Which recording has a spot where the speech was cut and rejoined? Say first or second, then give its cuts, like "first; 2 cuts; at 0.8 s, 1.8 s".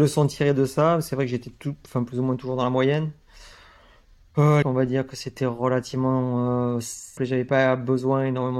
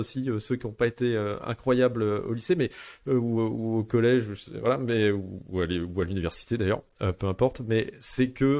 first; 2 cuts; at 4.6 s, 7.2 s